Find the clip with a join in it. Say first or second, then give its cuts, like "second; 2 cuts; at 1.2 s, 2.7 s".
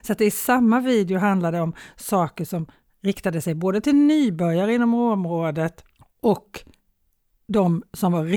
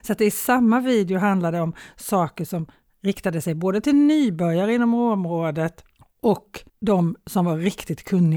second; 1 cut; at 6.7 s